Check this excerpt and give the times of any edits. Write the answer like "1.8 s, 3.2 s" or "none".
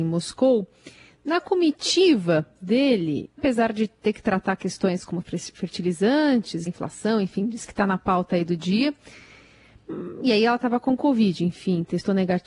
3.4 s, 6.7 s